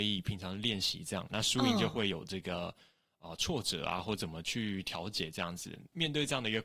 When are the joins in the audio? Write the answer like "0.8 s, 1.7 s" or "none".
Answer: 1.3 s